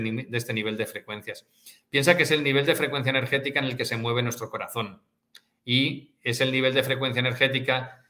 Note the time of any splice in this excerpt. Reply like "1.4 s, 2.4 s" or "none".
none